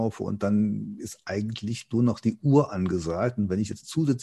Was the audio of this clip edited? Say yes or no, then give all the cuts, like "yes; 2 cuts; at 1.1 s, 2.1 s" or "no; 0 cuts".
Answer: no; 0 cuts